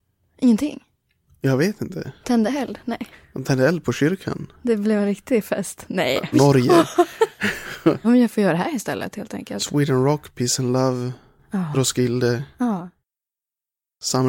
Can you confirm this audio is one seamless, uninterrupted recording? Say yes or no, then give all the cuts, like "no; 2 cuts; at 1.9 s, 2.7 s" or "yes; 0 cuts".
no; 2 cuts; at 6.3 s, 8.0 s